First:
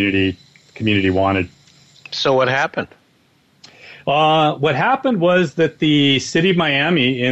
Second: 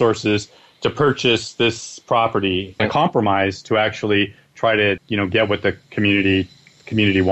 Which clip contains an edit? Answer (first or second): second